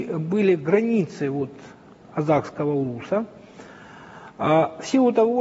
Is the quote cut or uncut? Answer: uncut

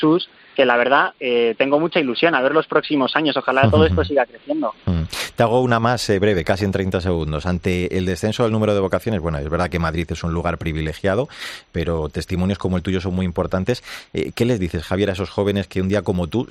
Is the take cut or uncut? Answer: uncut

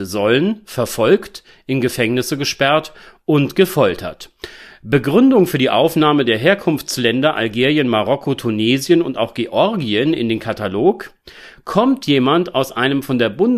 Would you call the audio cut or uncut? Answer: cut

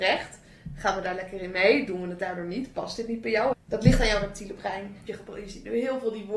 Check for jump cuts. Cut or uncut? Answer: cut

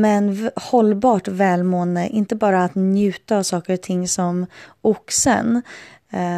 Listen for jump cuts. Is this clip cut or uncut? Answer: uncut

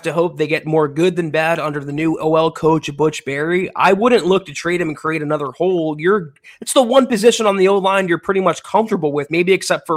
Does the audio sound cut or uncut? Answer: uncut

